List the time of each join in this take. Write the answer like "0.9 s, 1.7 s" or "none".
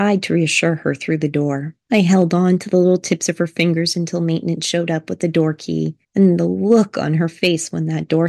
1.9 s